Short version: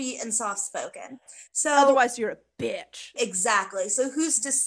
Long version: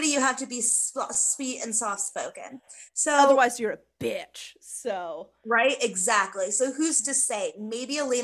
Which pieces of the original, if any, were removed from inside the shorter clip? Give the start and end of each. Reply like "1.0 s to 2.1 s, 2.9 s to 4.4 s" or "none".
4.6 s to 5.8 s